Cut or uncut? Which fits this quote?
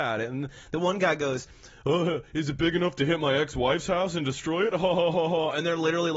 cut